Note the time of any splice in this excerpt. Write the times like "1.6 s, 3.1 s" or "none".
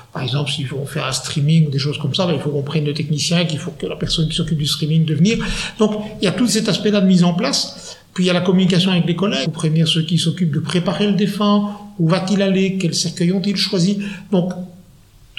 9.4 s